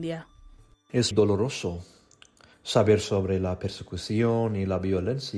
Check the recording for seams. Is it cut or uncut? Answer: cut